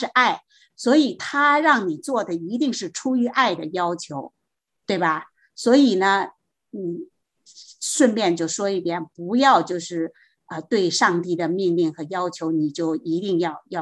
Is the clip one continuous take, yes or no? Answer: yes